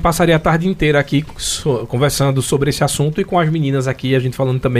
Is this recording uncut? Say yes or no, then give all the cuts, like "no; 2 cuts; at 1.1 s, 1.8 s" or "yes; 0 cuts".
yes; 0 cuts